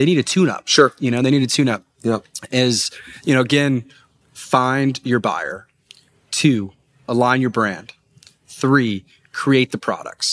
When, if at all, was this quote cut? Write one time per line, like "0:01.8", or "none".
0:04.2